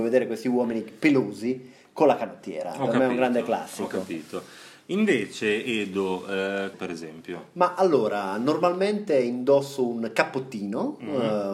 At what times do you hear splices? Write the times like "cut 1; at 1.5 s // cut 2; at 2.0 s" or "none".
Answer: cut 1; at 6.7 s